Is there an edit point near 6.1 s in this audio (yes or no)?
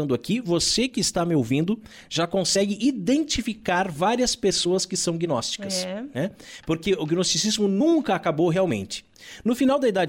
no